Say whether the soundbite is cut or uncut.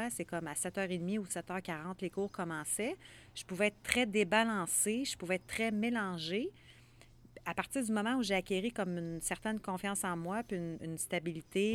cut